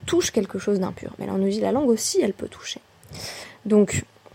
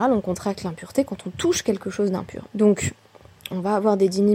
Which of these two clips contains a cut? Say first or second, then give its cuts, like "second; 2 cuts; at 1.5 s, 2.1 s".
second; 1 cut; at 2.5 s